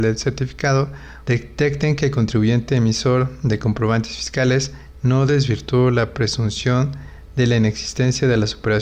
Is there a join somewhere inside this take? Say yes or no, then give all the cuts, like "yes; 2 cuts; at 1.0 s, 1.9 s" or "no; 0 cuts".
yes; 1 cut; at 1.2 s